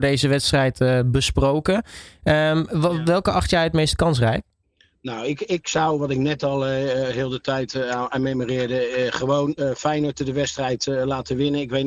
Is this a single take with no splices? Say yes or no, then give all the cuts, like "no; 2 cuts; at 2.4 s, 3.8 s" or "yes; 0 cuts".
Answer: yes; 0 cuts